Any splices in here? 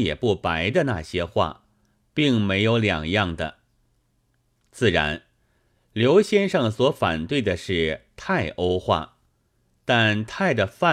no; 0 cuts

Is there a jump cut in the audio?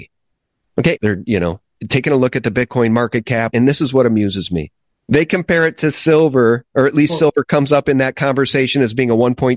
yes; 2 cuts; at 1.0 s, 3.5 s

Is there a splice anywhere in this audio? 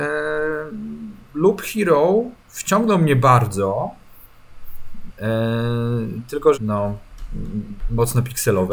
yes; 2 cuts; at 5.1 s, 6.5 s

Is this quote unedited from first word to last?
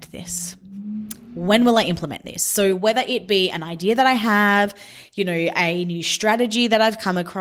yes; 0 cuts

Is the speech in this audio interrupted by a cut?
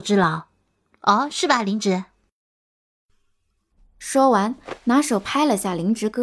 no; 0 cuts

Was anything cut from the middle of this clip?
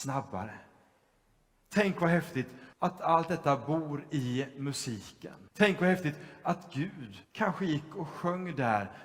yes; 3 cuts; at 2.7 s, 5.5 s, 7.2 s

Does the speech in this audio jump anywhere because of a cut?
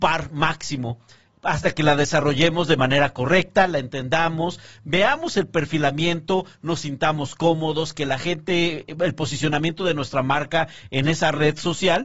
no; 0 cuts

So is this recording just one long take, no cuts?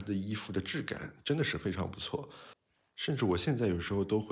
yes; 0 cuts

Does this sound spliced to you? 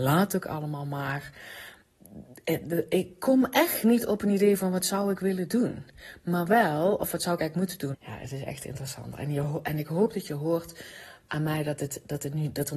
yes; 1 cut; at 7.9 s

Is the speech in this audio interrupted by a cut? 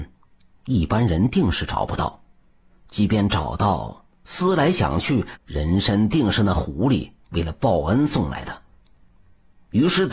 yes; 2 cuts; at 4.1 s, 5.4 s

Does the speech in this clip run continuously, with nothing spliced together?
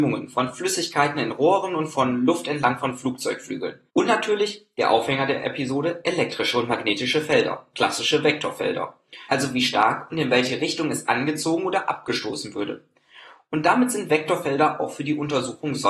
no; 2 cuts; at 3.9 s, 9.3 s

